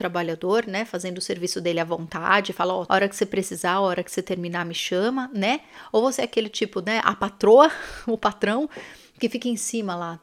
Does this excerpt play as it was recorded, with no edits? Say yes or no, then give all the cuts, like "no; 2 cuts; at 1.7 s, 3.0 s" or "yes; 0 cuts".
no; 1 cut; at 2.9 s